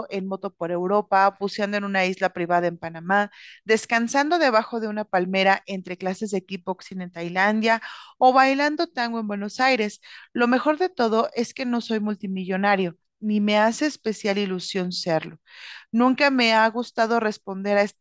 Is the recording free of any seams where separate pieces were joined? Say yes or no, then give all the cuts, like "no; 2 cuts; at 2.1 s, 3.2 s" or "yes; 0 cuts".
yes; 0 cuts